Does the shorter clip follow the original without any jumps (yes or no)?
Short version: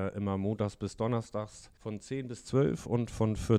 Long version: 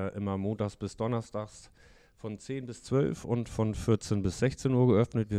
no